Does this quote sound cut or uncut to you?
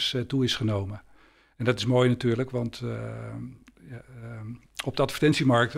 uncut